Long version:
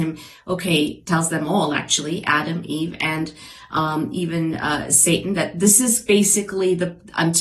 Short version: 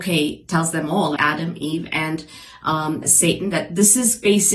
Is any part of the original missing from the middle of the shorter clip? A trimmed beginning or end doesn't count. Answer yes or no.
yes